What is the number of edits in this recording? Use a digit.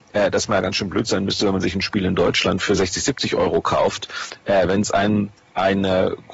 0